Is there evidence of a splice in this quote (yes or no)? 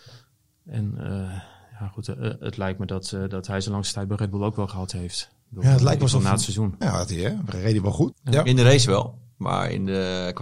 yes